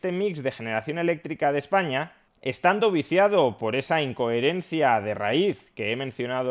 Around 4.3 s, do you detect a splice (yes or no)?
no